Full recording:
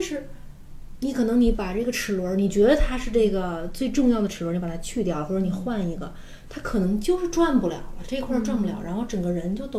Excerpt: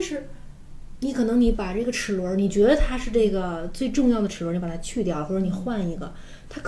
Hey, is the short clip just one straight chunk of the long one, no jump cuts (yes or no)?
yes